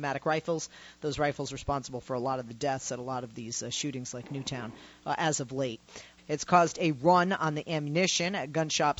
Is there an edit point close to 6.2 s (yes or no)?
yes